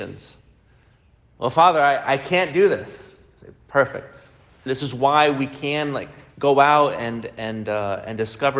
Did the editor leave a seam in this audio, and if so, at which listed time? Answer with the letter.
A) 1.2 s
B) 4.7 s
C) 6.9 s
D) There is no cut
B